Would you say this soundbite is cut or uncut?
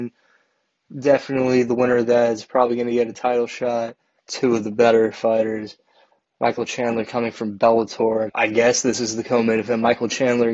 cut